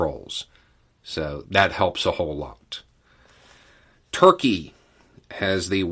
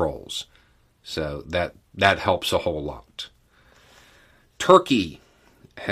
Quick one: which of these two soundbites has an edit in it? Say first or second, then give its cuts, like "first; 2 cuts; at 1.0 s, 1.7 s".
first; 1 cut; at 1.4 s